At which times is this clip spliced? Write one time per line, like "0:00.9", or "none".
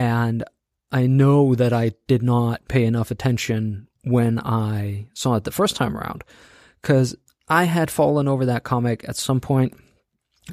none